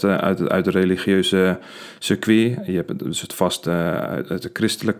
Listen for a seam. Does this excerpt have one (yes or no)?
no